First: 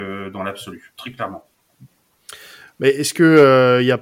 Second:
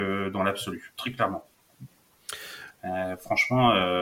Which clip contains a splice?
second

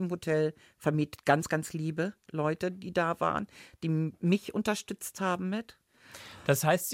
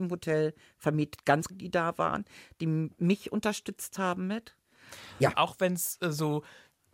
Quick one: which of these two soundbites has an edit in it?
second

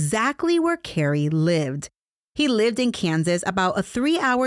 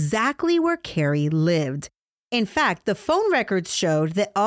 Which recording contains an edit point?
first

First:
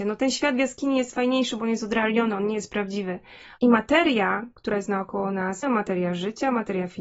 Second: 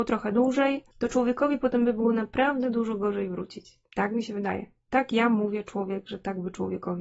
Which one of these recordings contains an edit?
first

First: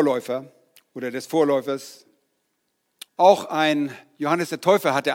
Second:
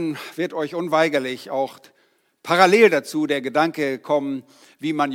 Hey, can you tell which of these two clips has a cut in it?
first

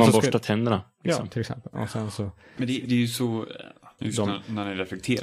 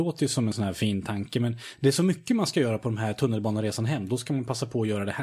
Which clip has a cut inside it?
first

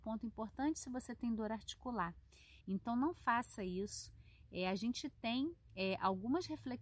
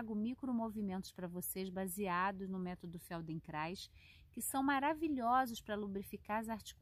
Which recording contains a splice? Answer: first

